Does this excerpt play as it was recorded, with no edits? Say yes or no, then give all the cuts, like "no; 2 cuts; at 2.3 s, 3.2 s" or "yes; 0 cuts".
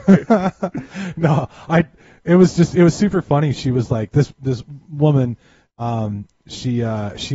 yes; 0 cuts